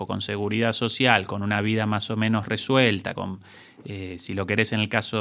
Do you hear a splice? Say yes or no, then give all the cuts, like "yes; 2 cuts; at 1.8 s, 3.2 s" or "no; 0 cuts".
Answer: no; 0 cuts